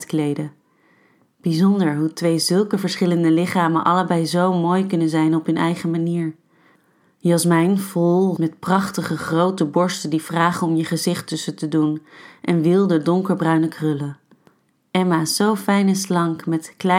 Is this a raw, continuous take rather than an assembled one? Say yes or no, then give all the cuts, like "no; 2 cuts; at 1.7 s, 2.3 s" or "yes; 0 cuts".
no; 1 cut; at 8.4 s